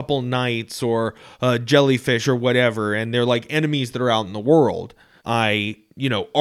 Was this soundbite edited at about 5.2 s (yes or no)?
yes